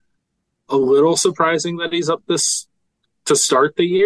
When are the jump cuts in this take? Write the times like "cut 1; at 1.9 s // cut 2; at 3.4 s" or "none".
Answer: none